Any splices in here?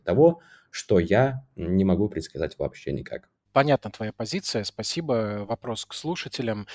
no; 0 cuts

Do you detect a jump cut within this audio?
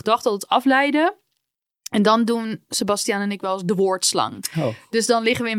no; 0 cuts

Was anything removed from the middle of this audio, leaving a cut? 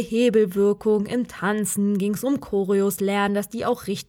no; 0 cuts

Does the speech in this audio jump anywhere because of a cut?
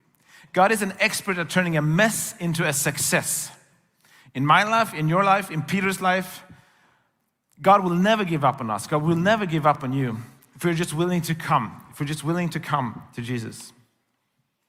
no; 0 cuts

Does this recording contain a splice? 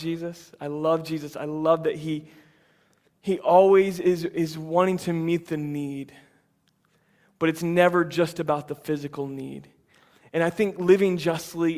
no; 0 cuts

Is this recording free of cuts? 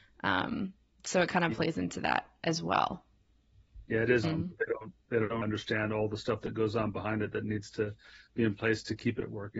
no; 2 cuts; at 4.2 s, 5.4 s

